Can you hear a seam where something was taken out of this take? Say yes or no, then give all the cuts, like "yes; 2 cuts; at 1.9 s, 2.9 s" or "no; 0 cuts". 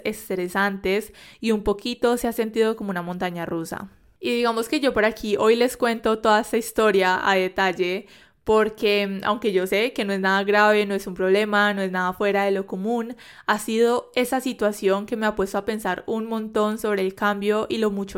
no; 0 cuts